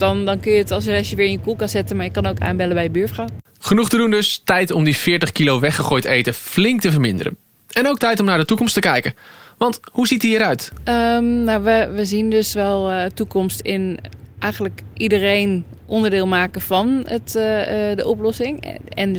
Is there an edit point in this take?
no; 0 cuts

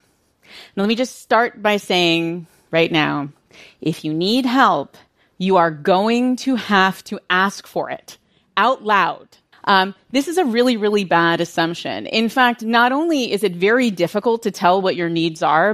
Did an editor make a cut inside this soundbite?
yes; 1 cut; at 9.5 s

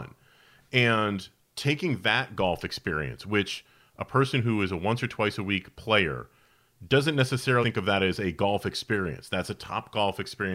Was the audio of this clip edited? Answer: yes; 1 cut; at 7.6 s

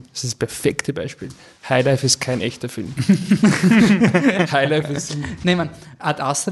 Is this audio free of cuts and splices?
yes; 0 cuts

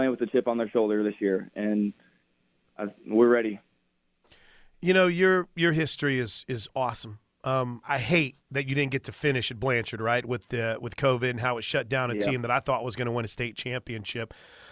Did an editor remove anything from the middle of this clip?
yes; 1 cut; at 7.8 s

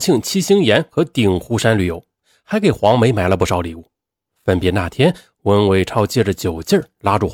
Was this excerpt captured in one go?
yes; 0 cuts

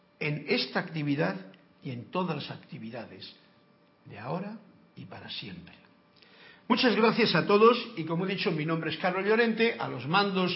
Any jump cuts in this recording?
no; 0 cuts

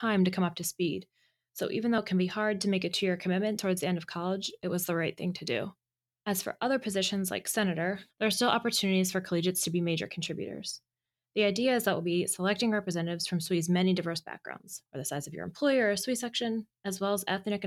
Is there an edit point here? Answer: yes; 2 cuts; at 8.1 s, 14.9 s

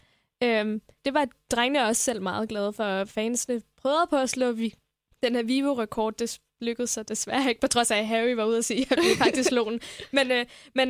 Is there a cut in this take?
yes; 1 cut; at 1.0 s

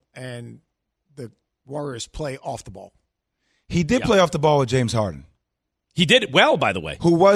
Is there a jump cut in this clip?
no; 0 cuts

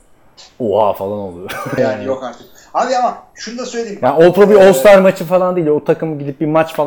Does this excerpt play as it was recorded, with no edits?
no; 1 cut; at 1.8 s

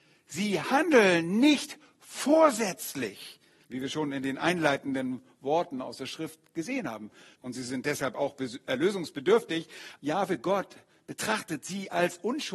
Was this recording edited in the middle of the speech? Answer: yes; 3 cuts; at 3.6 s, 7.3 s, 10.0 s

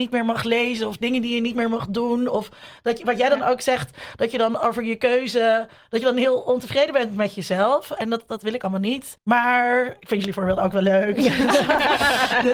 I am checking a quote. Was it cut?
yes; 1 cut; at 9.2 s

